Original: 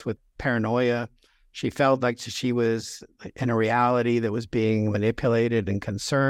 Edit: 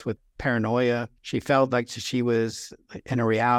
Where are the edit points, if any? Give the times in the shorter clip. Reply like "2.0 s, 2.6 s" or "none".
1.2 s